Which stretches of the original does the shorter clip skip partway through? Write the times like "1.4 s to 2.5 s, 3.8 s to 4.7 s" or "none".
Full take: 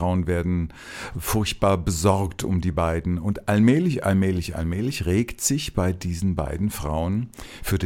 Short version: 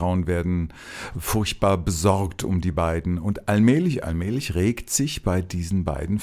4.0 s to 4.5 s